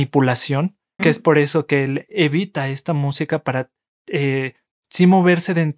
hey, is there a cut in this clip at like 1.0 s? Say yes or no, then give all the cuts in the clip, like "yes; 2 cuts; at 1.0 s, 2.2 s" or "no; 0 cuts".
yes; 1 cut; at 1.0 s